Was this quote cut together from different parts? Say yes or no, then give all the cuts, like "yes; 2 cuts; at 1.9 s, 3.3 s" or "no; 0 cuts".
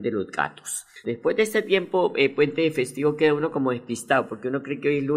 yes; 1 cut; at 1.0 s